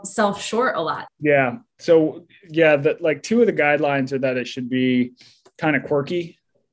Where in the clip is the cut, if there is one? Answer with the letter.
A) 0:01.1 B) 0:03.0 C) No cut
A